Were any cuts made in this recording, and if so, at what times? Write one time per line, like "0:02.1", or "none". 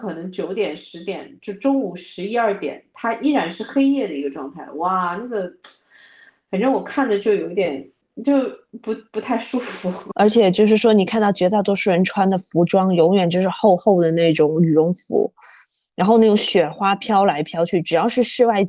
none